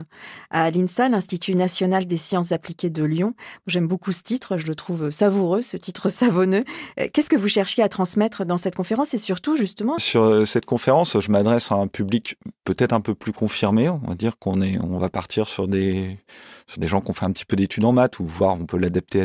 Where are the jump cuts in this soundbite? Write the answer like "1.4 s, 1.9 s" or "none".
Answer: 10.0 s

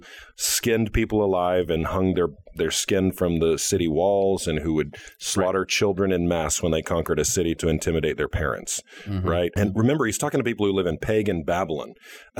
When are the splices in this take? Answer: 9.6 s

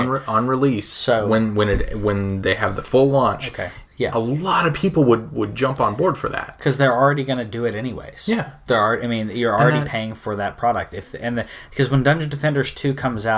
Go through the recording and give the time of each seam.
3.9 s

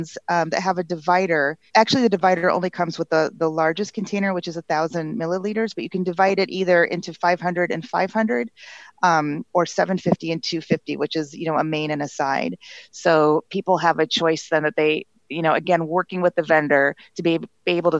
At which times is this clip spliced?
1.7 s

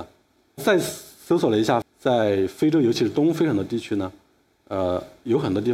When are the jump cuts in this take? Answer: 1.8 s

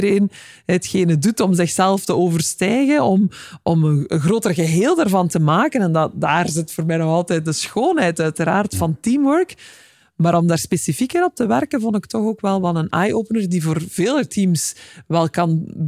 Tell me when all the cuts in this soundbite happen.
none

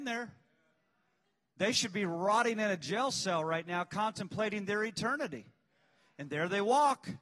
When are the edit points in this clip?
none

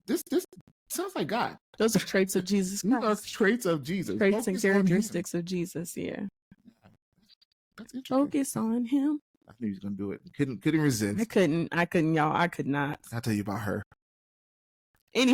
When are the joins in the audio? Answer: none

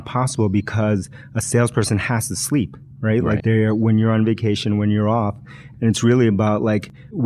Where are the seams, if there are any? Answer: 3.4 s, 5.7 s

